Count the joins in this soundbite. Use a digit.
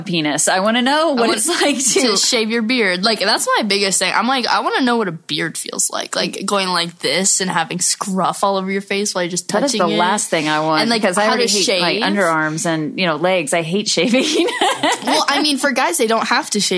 0